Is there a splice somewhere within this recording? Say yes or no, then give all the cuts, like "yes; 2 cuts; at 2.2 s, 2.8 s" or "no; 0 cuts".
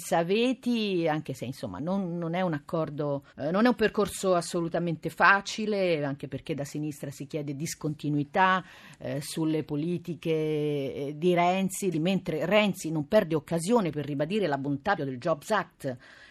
yes; 3 cuts; at 3.3 s, 11.9 s, 15.0 s